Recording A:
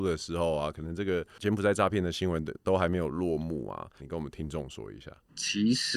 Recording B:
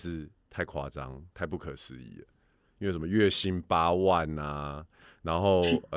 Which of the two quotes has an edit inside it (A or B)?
A